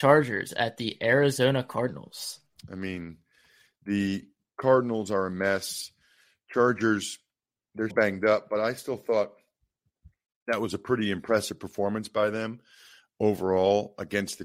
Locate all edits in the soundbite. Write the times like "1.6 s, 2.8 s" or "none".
2.6 s, 7.9 s

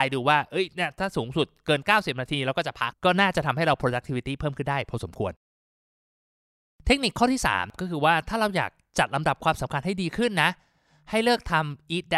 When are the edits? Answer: 2.9 s

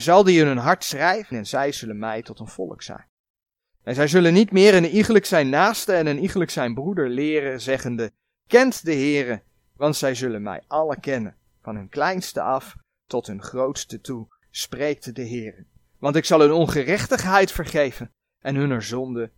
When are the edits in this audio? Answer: 1.3 s

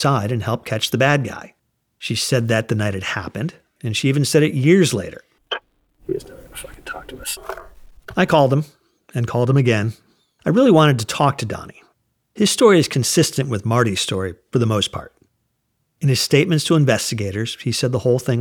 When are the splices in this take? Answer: 3.8 s, 5.4 s, 10.4 s

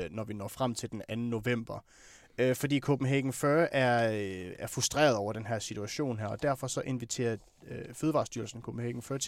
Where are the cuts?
none

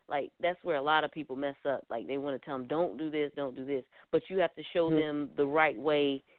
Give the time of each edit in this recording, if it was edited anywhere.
3.3 s

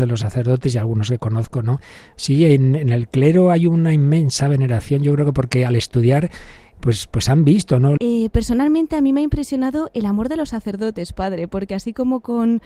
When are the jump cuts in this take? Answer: 8.0 s

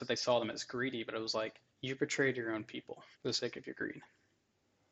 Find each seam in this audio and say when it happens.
1.7 s, 3.1 s

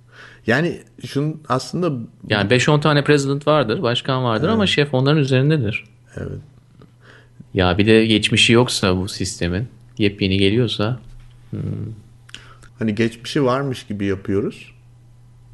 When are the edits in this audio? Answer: 7.4 s, 12.7 s

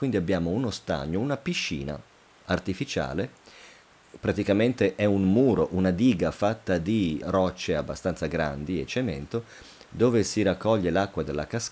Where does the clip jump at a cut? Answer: 7.2 s

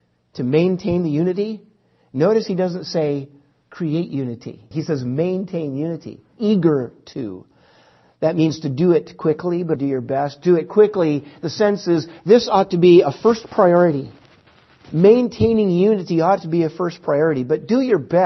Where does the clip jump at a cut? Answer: 4.7 s, 6.3 s, 9.8 s

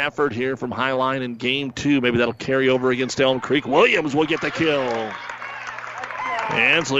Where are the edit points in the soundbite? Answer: none

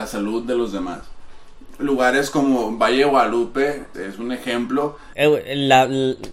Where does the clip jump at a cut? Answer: 3.9 s, 5.1 s

